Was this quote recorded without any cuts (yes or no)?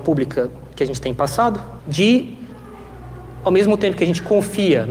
no